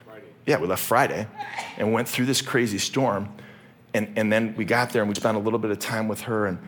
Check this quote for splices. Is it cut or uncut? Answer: cut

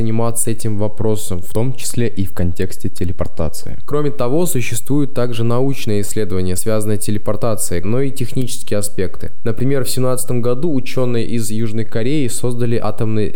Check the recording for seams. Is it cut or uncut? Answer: cut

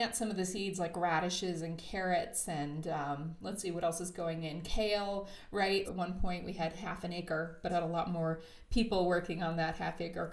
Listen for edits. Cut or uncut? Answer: cut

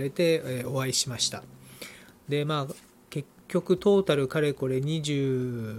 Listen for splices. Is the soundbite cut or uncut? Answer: uncut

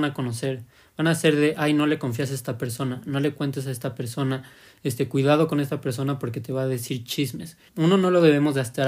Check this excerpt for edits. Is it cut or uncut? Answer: cut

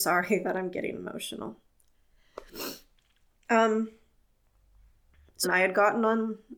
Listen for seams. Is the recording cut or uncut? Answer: cut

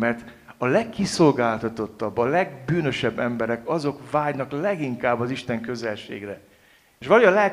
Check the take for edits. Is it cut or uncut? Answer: uncut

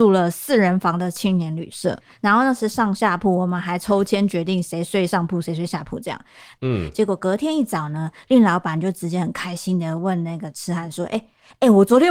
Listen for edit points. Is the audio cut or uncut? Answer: cut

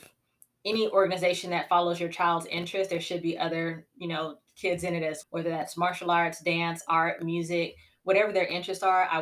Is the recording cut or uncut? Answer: cut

